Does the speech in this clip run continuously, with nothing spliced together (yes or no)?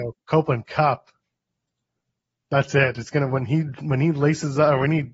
yes